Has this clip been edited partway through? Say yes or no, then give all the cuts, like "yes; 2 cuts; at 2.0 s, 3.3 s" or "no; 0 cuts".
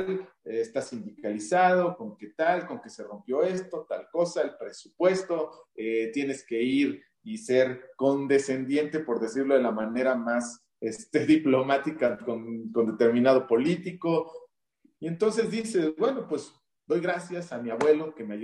yes; 1 cut; at 15.0 s